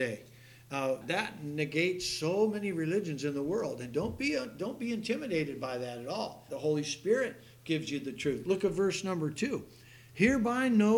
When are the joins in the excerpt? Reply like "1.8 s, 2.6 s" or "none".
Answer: 1.0 s, 6.5 s